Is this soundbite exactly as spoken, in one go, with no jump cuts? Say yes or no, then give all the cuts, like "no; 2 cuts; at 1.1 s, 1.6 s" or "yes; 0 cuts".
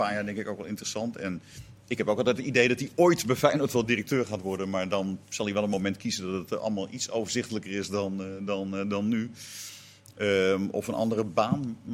yes; 0 cuts